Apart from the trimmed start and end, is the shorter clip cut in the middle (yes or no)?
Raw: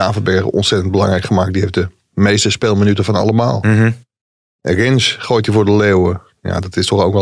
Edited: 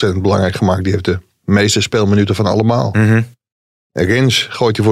no